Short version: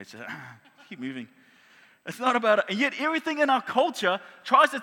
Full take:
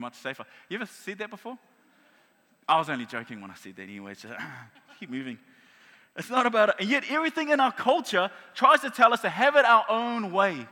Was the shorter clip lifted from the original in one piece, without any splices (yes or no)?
yes